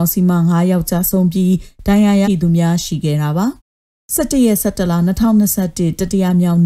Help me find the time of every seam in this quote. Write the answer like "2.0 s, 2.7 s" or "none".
2.2 s, 3.6 s